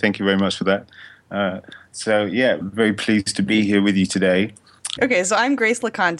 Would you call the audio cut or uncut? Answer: cut